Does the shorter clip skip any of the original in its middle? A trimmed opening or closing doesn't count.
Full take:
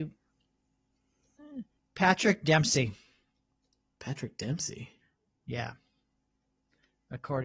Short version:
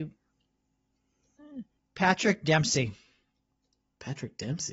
no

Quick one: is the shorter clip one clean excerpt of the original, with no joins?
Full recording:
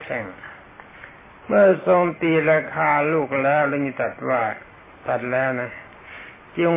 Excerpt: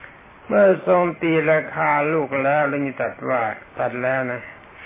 no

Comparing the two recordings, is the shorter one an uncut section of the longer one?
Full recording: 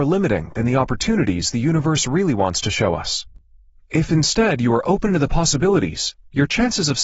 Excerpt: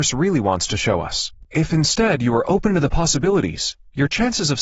no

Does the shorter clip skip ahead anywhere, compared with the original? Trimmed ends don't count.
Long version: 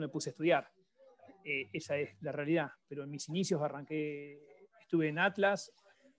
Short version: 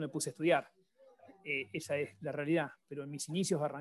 no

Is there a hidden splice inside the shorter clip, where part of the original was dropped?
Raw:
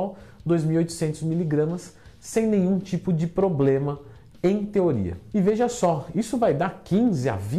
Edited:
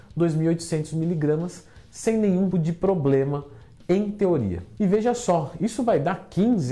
yes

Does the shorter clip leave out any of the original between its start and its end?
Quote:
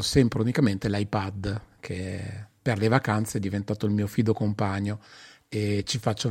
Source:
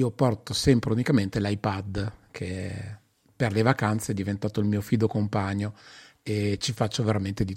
yes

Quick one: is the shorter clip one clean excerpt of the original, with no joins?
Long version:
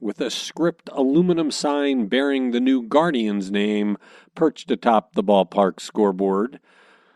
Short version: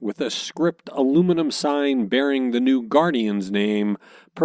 yes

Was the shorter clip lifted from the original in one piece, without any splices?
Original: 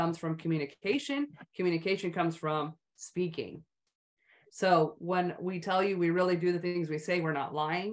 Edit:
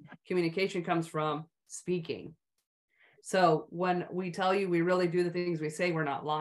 yes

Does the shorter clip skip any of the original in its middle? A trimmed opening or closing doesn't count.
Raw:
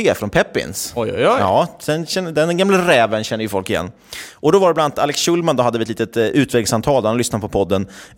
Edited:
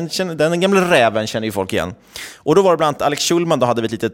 no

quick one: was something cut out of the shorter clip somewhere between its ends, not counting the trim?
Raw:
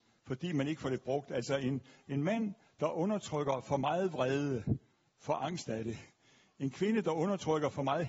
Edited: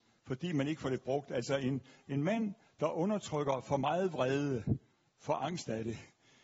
no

